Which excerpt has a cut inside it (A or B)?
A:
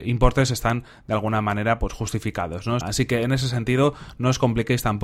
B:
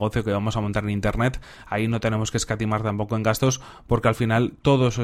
A